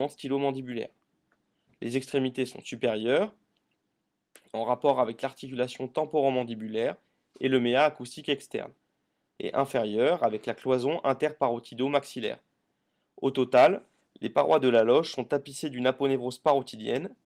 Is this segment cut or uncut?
uncut